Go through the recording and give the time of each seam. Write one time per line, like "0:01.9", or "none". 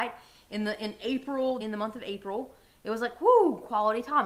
0:01.6